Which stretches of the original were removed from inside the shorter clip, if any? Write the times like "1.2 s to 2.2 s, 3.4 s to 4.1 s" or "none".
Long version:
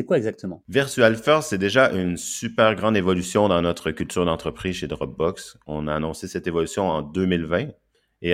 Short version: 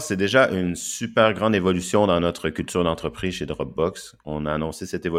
none